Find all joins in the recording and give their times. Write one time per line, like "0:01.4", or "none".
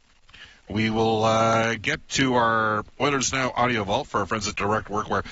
none